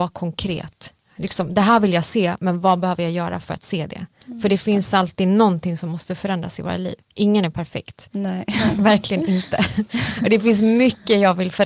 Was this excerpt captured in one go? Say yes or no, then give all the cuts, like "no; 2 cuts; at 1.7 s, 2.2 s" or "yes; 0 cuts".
yes; 0 cuts